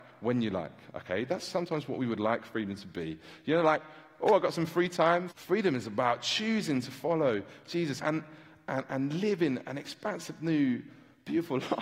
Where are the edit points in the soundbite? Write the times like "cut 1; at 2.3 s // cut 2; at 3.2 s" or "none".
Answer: cut 1; at 5.3 s // cut 2; at 8.0 s

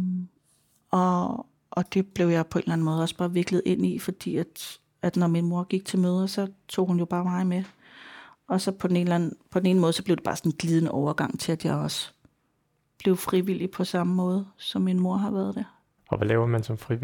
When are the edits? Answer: none

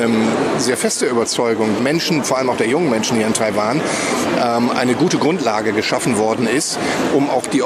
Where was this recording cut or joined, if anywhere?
cut 1; at 1.8 s

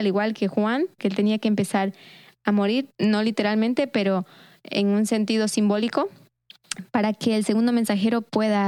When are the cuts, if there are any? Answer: cut 1; at 1.0 s // cut 2; at 2.9 s

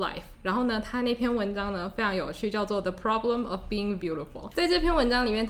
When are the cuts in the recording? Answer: cut 1; at 4.0 s

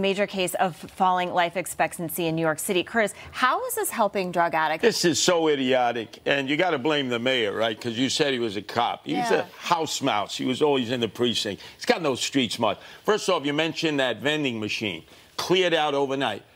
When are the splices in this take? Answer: cut 1; at 4.8 s

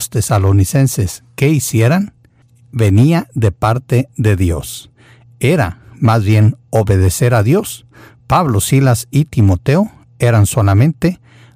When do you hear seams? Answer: none

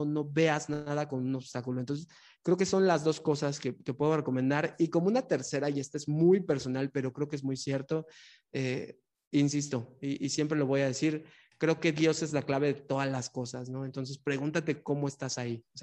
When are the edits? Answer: none

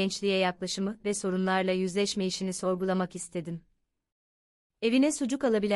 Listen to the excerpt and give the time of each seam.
cut 1; at 4.7 s

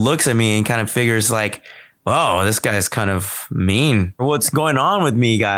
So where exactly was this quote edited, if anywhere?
cut 1; at 4.2 s

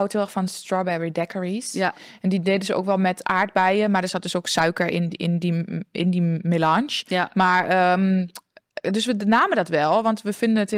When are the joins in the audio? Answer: none

